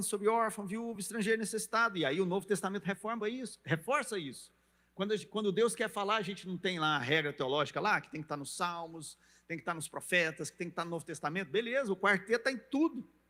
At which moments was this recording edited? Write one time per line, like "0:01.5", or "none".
none